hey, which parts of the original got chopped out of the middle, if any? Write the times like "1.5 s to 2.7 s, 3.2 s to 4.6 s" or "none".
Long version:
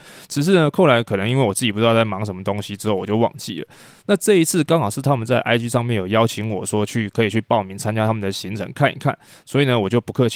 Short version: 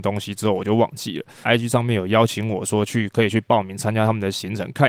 3.9 s to 5.4 s

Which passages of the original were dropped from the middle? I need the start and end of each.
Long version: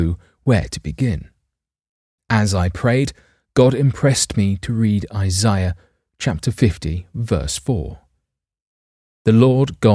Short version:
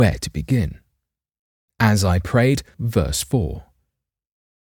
3.2 s to 7.1 s

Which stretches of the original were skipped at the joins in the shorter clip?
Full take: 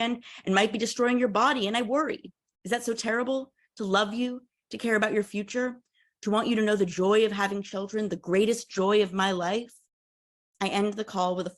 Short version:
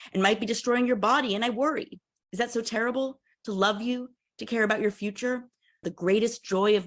6.2 s to 8.1 s

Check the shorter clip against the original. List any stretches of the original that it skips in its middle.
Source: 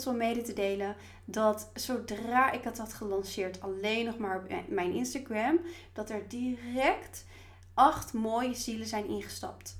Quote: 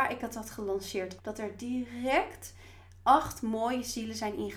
3.6 s to 5.9 s

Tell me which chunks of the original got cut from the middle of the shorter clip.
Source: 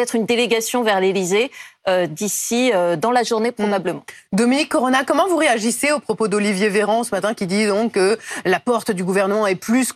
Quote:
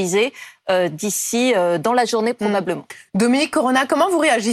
none

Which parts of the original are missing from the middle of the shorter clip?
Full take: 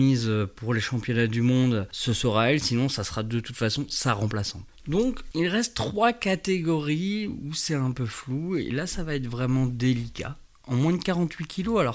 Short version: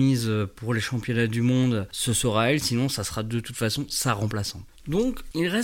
none

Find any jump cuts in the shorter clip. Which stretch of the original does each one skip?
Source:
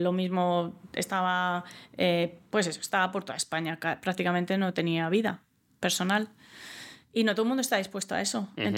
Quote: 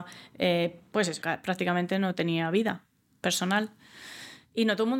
2.8 s to 3.8 s

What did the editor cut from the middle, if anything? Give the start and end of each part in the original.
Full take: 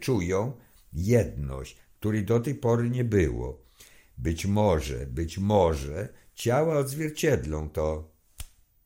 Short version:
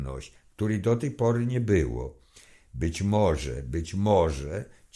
none

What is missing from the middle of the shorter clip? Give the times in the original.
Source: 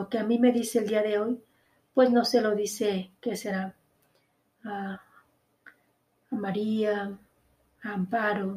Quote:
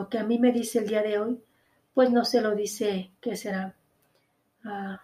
none

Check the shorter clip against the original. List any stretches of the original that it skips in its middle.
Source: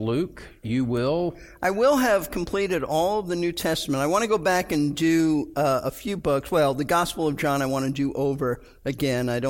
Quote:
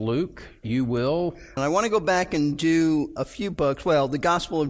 1.6 s to 4.0 s, 5.5 s to 5.8 s

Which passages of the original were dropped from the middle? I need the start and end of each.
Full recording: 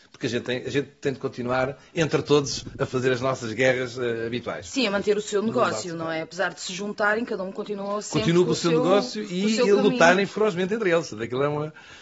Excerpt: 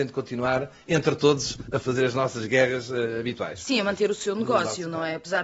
none

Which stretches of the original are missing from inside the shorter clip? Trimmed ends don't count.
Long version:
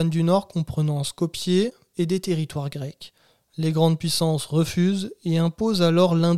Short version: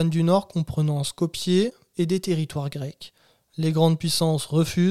none

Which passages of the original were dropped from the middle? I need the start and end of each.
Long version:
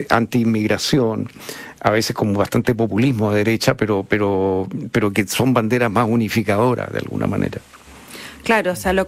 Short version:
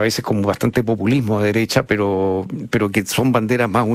3.8 s to 4.1 s

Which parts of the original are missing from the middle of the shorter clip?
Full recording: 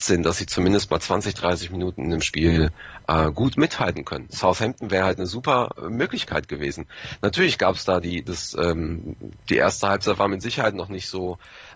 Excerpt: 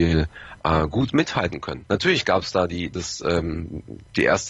4.3 s to 7.2 s

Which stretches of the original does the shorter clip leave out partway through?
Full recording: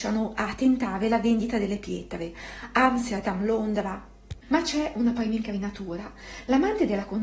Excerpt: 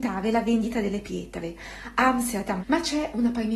3.4 s to 4.4 s

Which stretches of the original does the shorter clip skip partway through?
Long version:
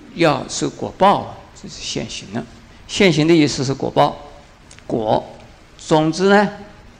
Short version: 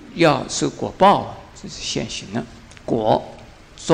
2.7 s to 4.7 s

